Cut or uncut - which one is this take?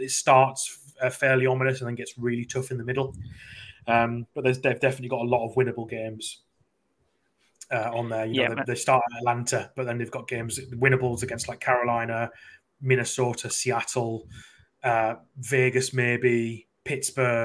uncut